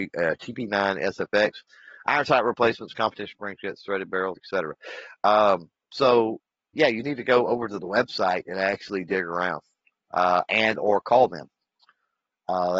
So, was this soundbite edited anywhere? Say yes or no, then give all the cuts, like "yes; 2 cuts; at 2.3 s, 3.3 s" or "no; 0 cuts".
yes; 1 cut; at 4.4 s